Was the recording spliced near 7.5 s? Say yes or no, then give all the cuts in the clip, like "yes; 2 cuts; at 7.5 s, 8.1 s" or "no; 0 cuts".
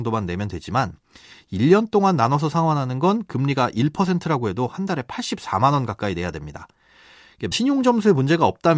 yes; 1 cut; at 7.5 s